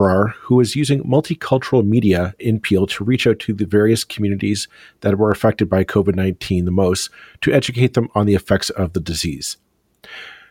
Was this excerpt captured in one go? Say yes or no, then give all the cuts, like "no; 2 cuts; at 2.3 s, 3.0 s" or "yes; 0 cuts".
yes; 0 cuts